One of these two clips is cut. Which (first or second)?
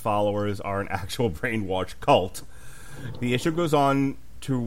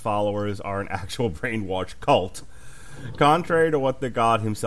first